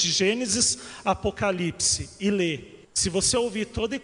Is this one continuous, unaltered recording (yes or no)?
no